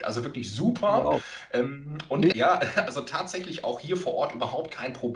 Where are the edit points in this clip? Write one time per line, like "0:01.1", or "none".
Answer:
0:02.3